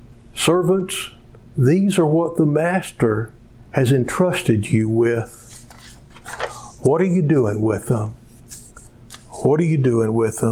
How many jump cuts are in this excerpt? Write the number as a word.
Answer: zero